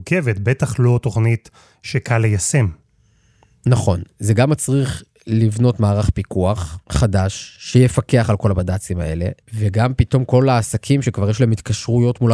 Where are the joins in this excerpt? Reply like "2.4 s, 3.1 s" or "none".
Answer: 6.8 s, 9.4 s